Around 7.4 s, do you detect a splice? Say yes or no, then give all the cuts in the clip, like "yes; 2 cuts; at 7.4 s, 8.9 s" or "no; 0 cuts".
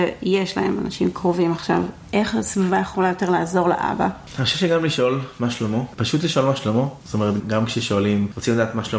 yes; 1 cut; at 7.4 s